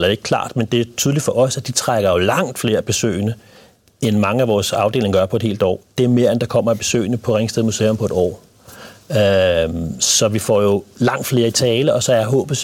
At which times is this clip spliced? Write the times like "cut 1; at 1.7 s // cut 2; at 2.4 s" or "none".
cut 1; at 5.8 s